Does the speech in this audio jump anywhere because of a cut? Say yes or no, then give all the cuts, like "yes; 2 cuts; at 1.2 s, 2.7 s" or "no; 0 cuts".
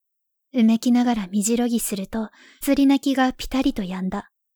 yes; 1 cut; at 2.6 s